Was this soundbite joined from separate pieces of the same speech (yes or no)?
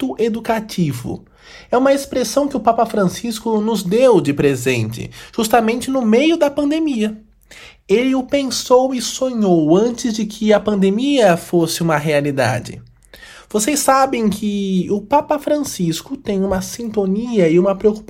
no